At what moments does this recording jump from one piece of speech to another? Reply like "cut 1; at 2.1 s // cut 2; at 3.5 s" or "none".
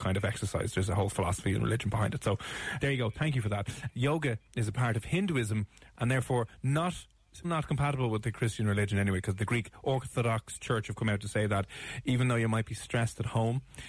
cut 1; at 2.8 s // cut 2; at 3.9 s // cut 3; at 7.4 s